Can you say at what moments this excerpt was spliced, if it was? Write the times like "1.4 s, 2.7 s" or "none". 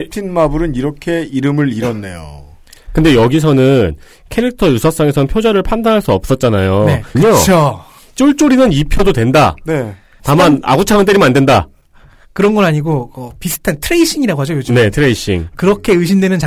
7.1 s, 10.2 s